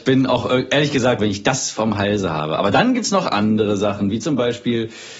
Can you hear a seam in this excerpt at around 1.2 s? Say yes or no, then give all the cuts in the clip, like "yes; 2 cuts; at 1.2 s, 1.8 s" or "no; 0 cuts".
yes; 1 cut; at 1.2 s